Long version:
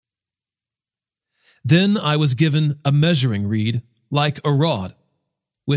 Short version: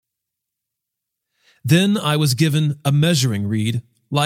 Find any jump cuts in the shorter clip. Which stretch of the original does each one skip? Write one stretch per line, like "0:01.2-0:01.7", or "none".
none